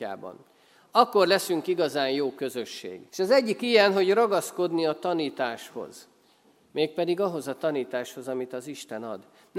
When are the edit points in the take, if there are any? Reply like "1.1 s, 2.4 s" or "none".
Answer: 3.1 s